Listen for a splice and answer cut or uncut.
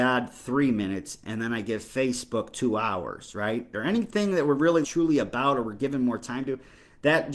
cut